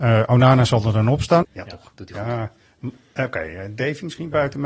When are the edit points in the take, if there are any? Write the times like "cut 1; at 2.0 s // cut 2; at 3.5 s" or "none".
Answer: cut 1; at 1.4 s